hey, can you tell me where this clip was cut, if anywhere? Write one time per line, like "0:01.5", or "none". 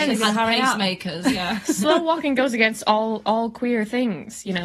none